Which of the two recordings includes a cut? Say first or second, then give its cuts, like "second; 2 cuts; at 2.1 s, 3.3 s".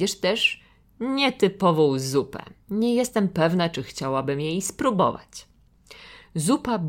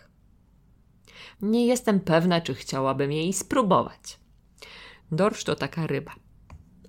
second; 2 cuts; at 1.3 s, 5.0 s